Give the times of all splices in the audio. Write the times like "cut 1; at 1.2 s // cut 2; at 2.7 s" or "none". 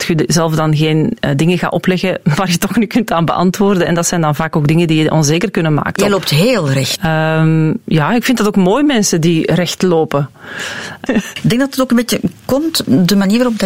cut 1; at 6.0 s // cut 2; at 7.0 s // cut 3; at 11.1 s